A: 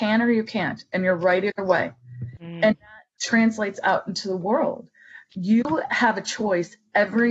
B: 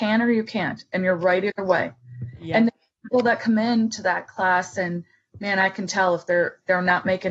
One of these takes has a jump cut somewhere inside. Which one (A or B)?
A